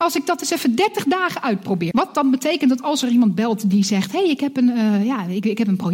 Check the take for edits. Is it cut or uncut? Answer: cut